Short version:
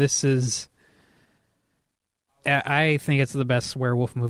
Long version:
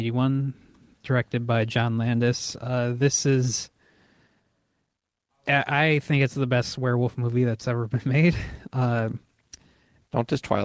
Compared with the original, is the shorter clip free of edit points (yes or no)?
yes